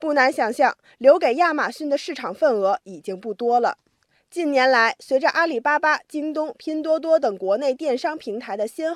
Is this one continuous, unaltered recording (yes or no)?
yes